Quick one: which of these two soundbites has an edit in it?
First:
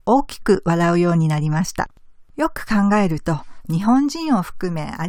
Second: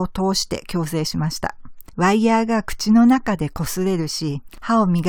first; 1 cut; at 2.3 s

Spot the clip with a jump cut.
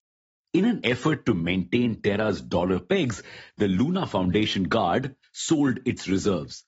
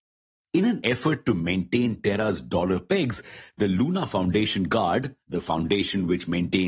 first; 1 cut; at 5.2 s

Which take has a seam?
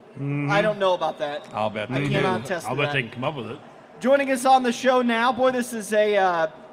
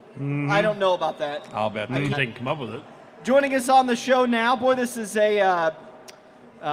second; 1 cut; at 2.1 s

